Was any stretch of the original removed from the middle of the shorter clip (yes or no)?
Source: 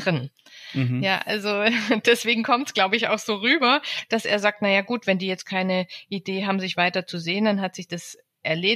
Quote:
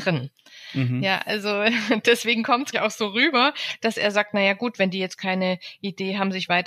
yes